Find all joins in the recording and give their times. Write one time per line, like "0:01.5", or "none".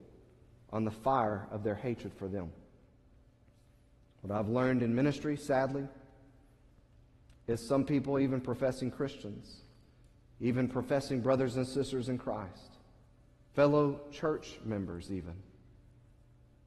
none